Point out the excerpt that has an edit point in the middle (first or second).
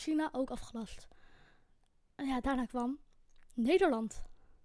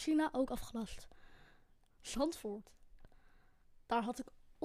second